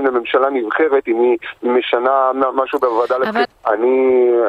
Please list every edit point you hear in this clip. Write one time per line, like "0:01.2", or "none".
0:03.4

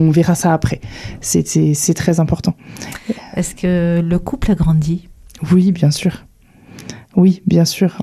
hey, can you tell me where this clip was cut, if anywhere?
none

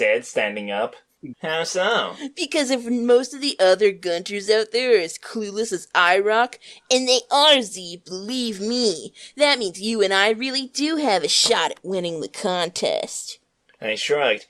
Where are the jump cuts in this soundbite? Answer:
0:01.3

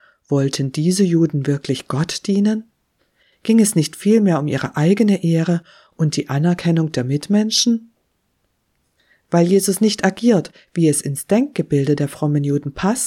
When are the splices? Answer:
none

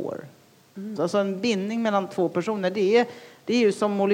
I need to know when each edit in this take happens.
0:01.0

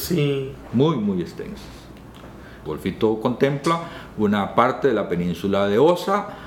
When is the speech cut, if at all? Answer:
0:02.7

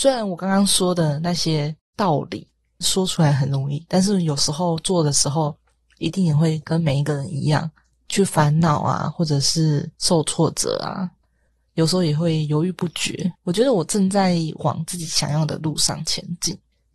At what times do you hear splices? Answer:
0:13.4

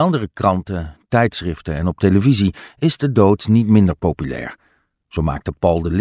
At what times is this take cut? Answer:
none

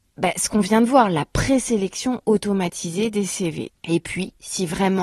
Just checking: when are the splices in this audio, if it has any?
0:03.7

